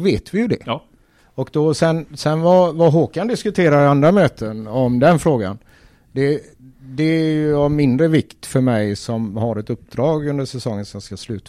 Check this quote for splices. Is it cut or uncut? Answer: uncut